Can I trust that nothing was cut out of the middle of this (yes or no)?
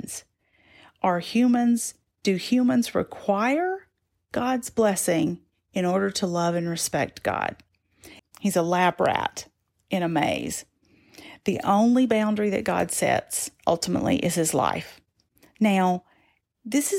no